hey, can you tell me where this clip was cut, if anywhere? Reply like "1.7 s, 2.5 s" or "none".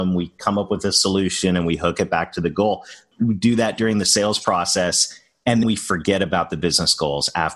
3.1 s, 5.6 s

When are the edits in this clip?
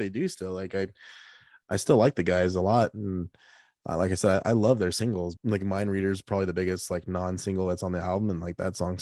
5.4 s

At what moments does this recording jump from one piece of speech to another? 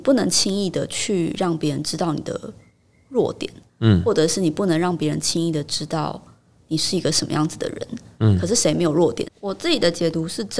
8.2 s, 9.2 s

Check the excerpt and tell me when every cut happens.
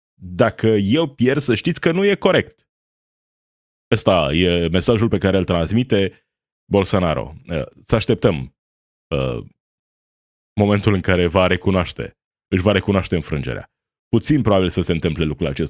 none

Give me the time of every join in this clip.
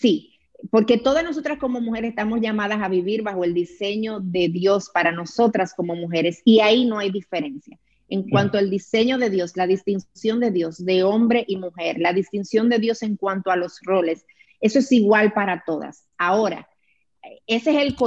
none

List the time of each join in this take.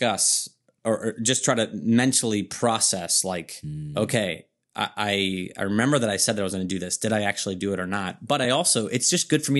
none

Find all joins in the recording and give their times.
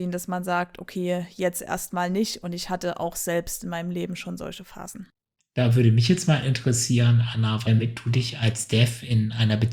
5.4 s, 7.6 s

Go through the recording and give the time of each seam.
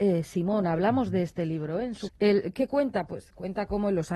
2.1 s

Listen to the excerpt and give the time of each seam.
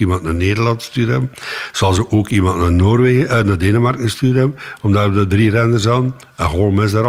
none

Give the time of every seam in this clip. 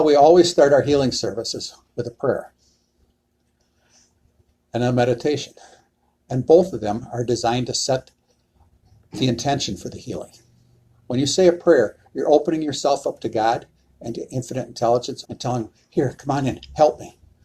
15.2 s

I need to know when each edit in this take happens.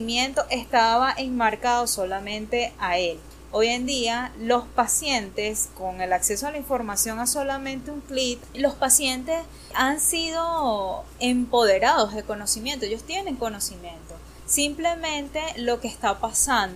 3.5 s

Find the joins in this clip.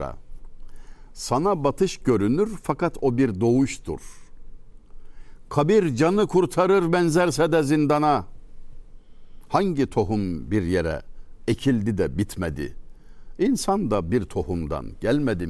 none

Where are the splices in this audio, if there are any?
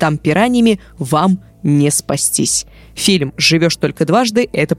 none

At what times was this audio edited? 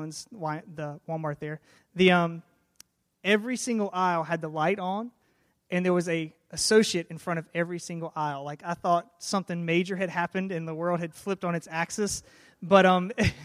none

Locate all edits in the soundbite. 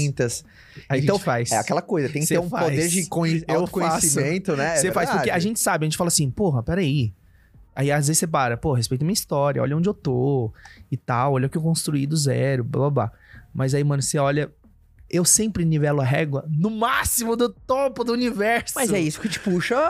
15.1 s

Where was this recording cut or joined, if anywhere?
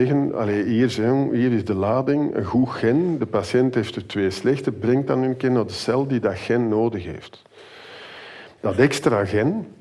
8.6 s

